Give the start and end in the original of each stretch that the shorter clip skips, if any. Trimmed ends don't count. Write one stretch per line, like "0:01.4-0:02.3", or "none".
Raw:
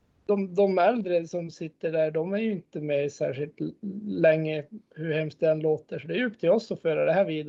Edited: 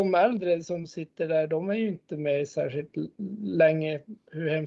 none